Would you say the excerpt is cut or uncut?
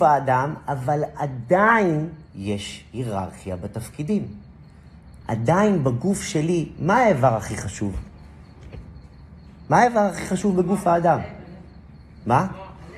cut